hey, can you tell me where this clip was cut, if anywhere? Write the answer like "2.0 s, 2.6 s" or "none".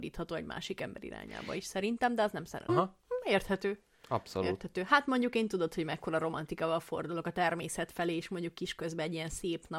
2.7 s

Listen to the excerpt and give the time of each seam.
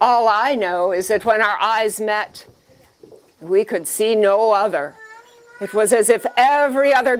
none

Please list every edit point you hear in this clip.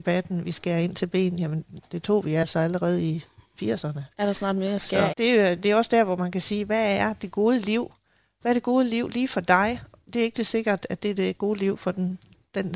5.1 s

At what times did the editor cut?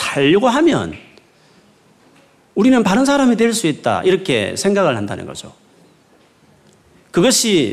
none

